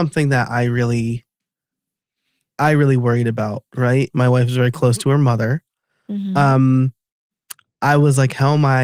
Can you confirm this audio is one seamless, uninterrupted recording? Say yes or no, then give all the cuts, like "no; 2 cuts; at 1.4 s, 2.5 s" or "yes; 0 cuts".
no; 1 cut; at 4.1 s